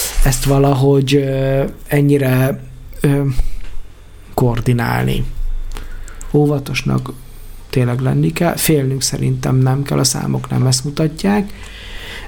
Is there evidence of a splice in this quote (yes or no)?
yes